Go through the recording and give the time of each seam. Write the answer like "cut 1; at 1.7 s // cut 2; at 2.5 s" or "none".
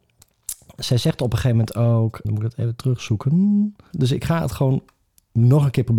cut 1; at 2.2 s // cut 2; at 3.9 s